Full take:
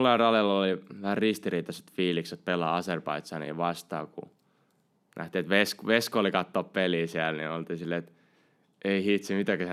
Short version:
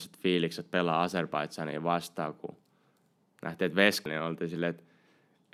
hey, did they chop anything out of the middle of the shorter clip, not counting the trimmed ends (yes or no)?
yes